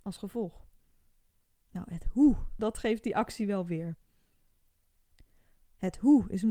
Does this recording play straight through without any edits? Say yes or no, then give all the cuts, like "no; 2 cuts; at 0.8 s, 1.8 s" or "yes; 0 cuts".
yes; 0 cuts